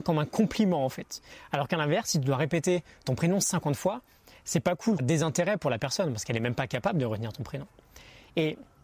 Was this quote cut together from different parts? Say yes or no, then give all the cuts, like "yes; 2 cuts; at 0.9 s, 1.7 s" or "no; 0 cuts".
yes; 1 cut; at 5.0 s